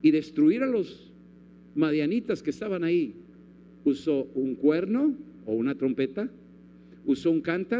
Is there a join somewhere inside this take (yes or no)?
yes